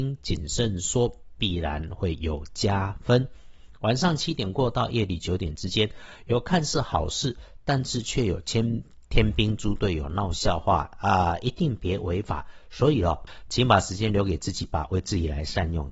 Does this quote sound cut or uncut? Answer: uncut